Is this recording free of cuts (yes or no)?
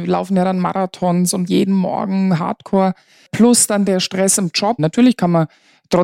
no